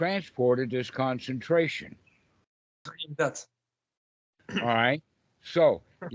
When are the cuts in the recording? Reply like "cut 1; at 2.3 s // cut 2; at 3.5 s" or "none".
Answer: cut 1; at 2.9 s